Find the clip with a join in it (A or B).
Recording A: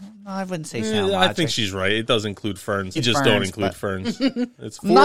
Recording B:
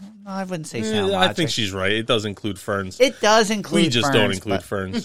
A